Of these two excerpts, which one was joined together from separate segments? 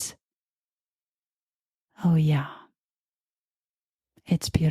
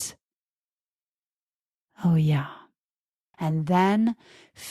second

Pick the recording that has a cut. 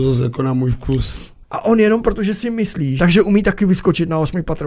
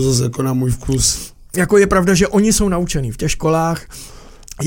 first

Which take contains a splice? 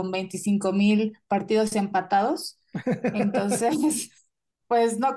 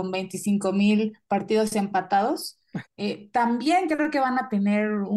second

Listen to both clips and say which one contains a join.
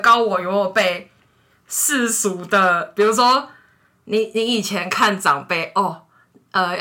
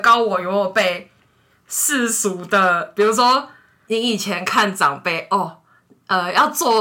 second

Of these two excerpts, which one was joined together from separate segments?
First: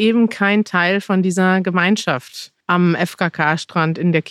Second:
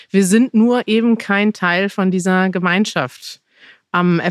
first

